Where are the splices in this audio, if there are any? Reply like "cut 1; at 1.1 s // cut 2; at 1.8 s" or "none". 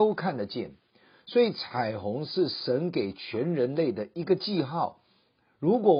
none